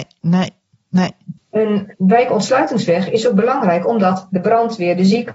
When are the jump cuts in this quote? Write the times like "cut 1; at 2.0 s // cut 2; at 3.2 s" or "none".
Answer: cut 1; at 1.4 s